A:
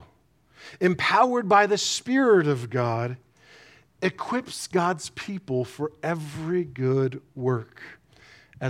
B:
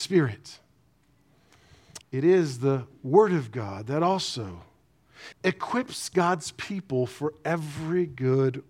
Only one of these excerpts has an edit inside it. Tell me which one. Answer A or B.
B